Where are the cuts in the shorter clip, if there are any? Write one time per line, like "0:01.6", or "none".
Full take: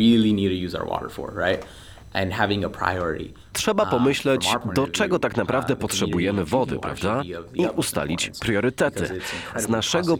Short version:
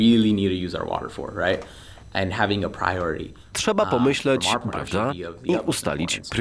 0:04.7

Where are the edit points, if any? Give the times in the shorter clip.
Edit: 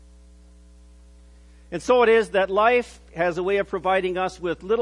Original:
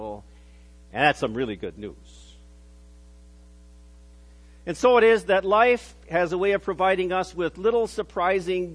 none

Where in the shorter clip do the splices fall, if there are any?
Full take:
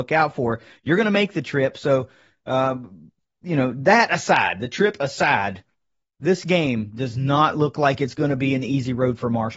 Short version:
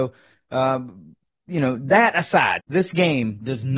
0:02.6

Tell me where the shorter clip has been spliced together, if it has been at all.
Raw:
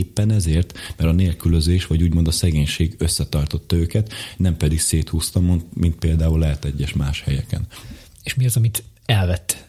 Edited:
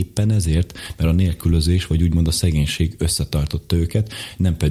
none

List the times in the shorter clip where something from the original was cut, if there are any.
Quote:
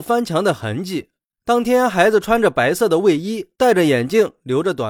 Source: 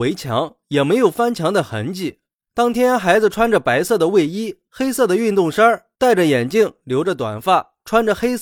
0:03.5

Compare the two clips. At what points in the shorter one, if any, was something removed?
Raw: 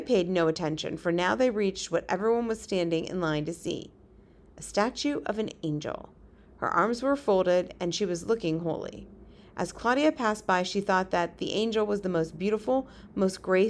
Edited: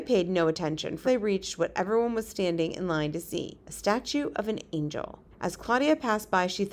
0:01.0
0:03.6
0:05.3

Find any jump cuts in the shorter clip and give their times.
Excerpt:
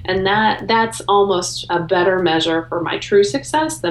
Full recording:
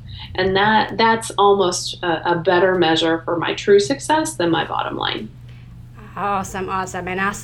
0:01.7

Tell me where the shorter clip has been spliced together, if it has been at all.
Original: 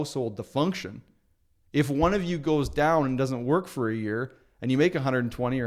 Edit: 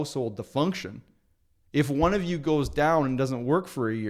none

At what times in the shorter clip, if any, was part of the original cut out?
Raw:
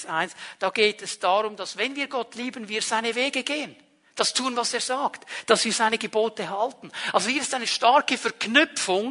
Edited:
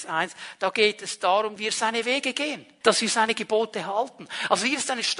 0:01.6
0:02.8

